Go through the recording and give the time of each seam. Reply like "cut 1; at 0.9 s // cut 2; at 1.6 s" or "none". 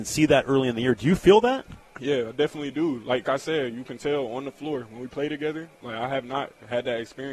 cut 1; at 3.2 s

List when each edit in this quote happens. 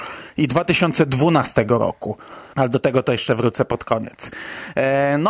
cut 1; at 2.5 s

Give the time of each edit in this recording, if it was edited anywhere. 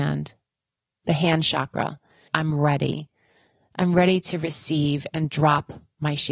cut 1; at 2.3 s

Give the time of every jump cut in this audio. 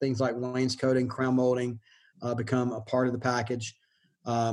none

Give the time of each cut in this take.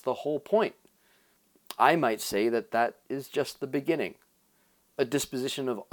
none

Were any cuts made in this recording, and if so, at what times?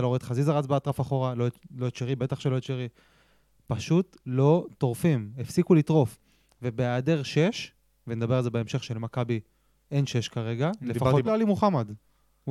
cut 1; at 11.2 s

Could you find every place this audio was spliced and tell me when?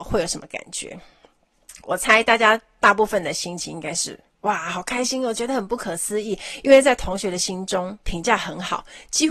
none

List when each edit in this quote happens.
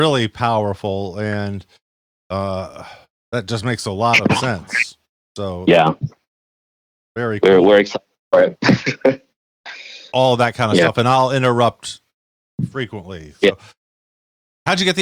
cut 1; at 10.1 s

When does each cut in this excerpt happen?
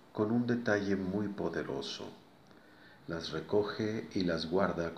cut 1; at 3.0 s

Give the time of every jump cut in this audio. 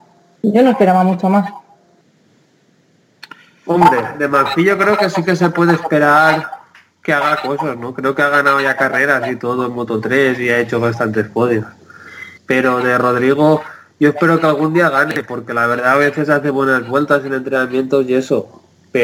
cut 1; at 12.4 s

